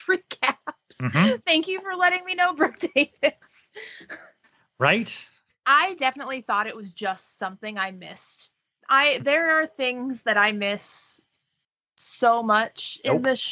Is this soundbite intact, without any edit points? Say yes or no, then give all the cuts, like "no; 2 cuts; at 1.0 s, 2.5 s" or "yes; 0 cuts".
no; 1 cut; at 5.5 s